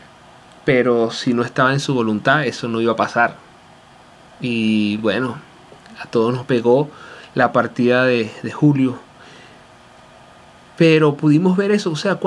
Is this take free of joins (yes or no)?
yes